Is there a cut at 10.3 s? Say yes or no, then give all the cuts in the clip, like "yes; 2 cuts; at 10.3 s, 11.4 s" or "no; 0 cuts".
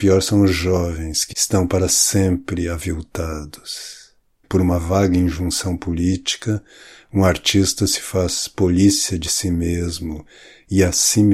no; 2 cuts; at 1.3 s, 4.4 s